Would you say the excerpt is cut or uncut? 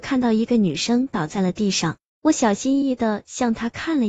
cut